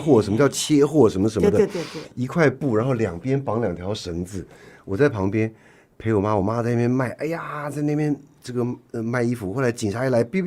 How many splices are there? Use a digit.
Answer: 0